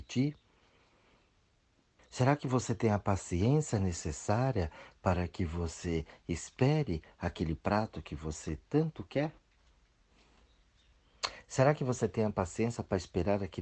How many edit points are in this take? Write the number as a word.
one